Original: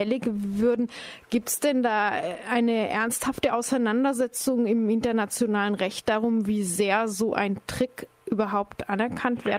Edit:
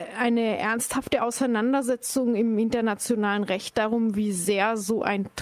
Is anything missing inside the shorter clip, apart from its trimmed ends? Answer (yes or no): no